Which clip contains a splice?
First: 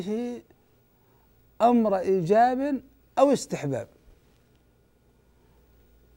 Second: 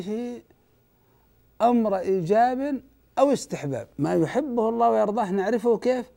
second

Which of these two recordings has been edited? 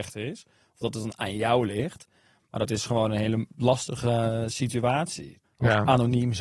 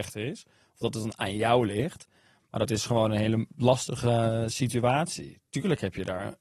first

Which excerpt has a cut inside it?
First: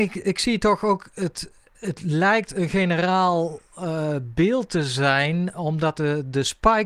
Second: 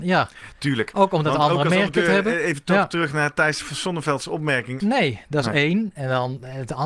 second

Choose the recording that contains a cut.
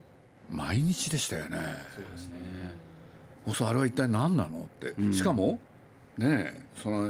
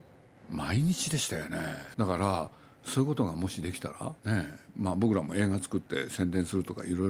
second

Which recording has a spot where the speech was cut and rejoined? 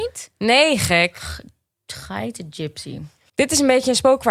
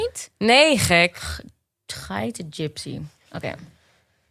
first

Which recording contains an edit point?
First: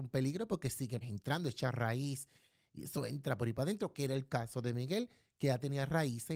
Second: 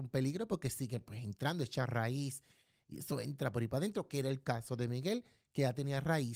first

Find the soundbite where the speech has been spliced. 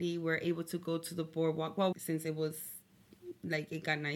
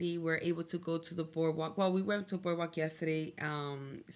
first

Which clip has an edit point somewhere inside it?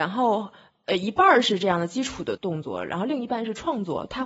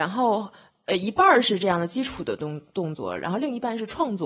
first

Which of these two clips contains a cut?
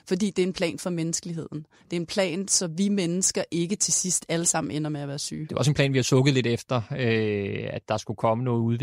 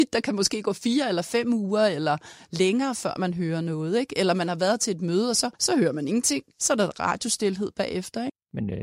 second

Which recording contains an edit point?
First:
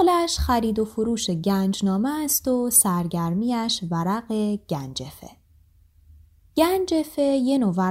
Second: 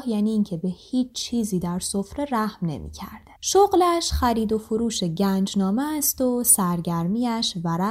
second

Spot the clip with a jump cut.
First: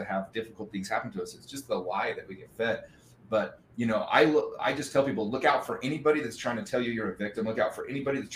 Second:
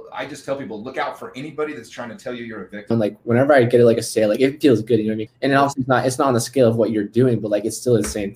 second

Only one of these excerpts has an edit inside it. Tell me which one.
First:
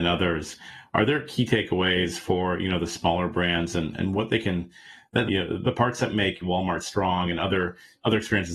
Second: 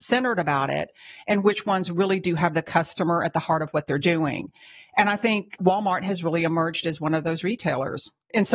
first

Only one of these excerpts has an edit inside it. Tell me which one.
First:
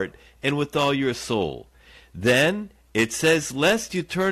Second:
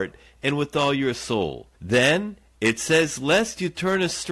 second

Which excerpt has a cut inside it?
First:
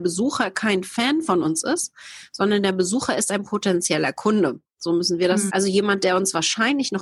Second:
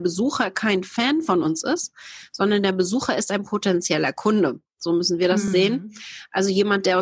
first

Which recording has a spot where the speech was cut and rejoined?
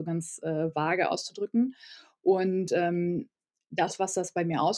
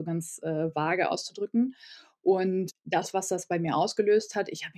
second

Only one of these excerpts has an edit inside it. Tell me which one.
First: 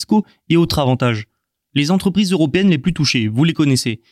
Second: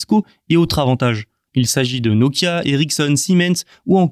second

